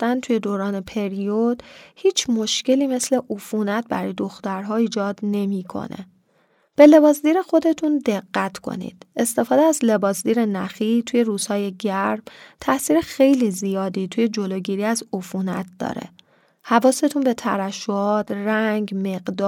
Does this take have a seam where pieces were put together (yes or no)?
no